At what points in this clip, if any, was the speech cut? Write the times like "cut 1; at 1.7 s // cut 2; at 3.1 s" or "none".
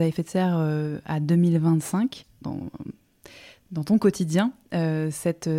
cut 1; at 2.4 s

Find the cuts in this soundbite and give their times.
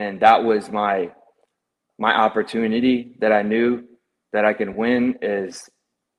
cut 1; at 1.9 s

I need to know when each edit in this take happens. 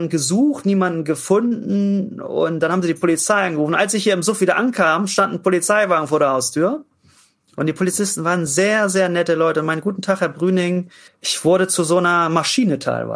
cut 1; at 11.1 s

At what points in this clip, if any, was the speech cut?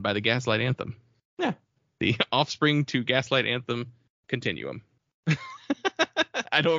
cut 1; at 5.0 s

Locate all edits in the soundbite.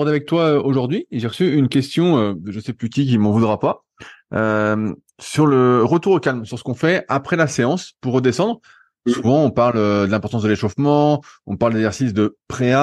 none

